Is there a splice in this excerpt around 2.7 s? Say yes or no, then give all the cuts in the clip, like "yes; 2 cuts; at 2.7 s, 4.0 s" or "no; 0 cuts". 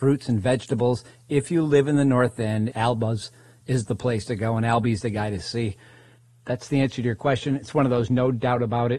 yes; 1 cut; at 2.7 s